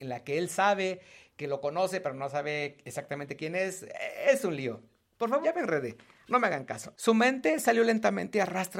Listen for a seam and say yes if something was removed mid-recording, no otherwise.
yes